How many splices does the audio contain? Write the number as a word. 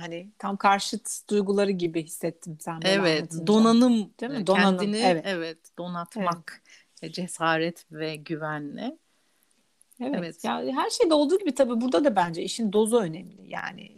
zero